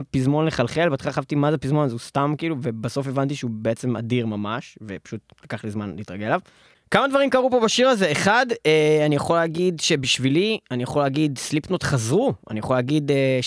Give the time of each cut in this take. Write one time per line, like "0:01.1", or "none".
none